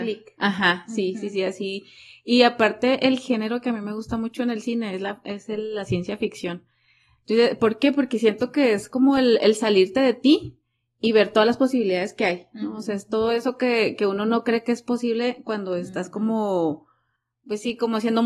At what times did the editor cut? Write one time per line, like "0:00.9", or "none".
none